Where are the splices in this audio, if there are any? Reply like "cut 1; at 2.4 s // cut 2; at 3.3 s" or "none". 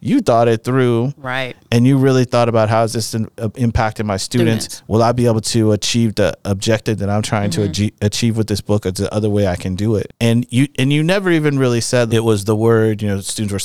cut 1; at 12.1 s